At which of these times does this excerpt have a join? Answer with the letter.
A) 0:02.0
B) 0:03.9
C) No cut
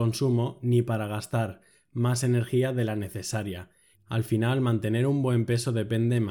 B